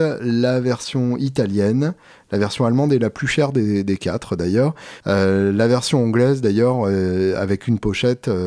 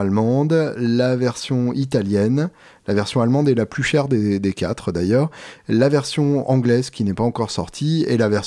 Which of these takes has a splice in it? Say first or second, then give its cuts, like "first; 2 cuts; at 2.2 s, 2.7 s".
first; 1 cut; at 5.0 s